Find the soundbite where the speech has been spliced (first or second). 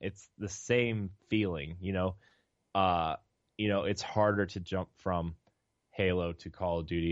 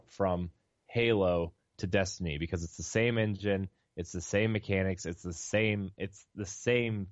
first